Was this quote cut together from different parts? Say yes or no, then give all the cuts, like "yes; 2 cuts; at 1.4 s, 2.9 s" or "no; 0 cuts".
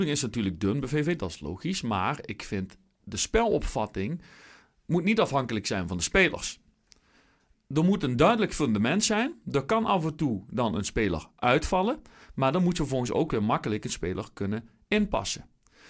no; 0 cuts